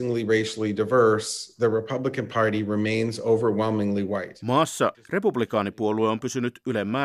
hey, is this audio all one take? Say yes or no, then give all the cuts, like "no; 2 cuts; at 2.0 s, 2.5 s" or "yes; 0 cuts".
no; 1 cut; at 4.9 s